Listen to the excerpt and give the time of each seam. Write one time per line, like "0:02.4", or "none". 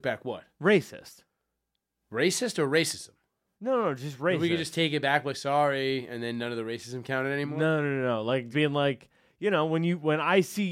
0:08.5